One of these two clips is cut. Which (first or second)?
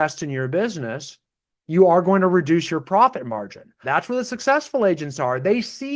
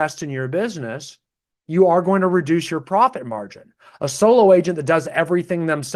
first